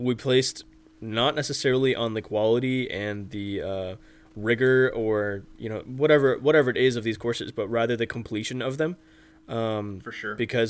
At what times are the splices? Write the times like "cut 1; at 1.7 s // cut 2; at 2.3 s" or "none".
none